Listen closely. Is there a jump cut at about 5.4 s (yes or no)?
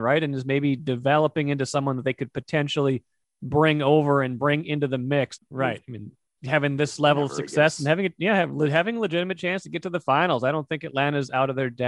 yes